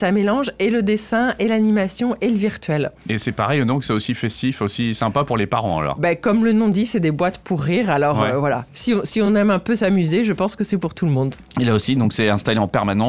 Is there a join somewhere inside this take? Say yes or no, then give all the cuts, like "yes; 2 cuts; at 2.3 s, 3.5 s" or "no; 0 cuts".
no; 0 cuts